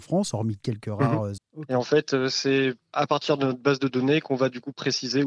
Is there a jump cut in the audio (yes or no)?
yes